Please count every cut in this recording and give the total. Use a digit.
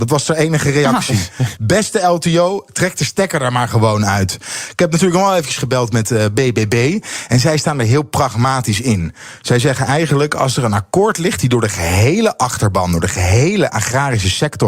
1